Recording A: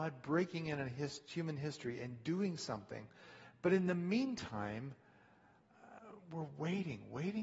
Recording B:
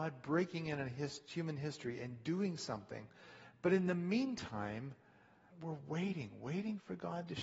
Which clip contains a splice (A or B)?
B